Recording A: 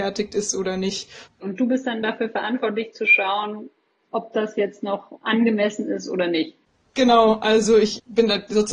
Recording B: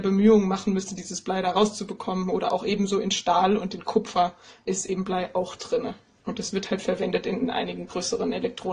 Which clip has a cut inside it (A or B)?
A